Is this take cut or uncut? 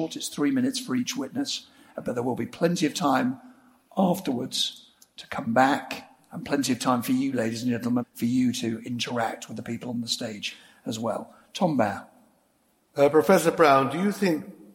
cut